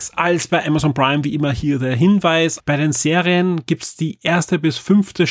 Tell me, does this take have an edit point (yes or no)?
yes